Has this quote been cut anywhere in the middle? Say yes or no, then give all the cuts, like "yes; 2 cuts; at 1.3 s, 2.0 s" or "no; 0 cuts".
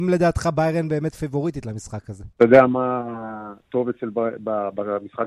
yes; 1 cut; at 2.3 s